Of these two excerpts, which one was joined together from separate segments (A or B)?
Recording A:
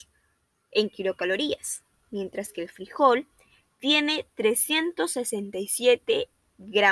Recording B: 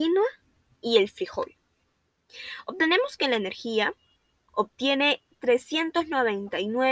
B